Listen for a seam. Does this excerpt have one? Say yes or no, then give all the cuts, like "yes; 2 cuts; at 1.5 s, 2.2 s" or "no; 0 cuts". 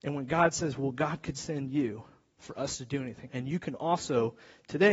yes; 1 cut; at 3.3 s